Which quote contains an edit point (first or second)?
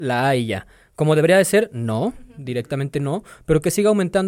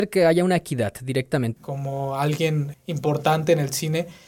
second